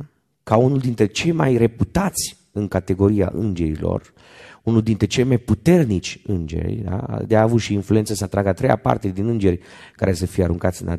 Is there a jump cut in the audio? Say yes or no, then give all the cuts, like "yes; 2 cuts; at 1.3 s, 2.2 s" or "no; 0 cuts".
no; 0 cuts